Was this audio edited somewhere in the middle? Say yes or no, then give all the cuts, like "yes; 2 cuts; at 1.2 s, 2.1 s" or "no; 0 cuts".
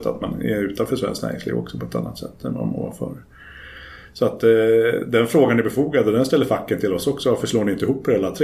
no; 0 cuts